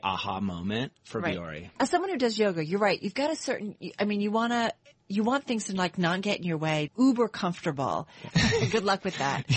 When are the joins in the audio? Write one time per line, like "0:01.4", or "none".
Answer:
0:06.9
0:08.3